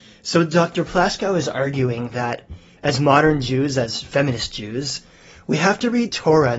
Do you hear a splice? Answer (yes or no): no